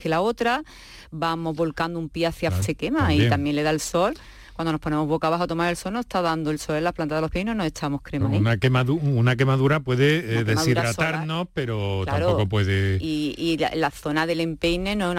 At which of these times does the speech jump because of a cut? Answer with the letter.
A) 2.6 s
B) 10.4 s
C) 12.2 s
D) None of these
A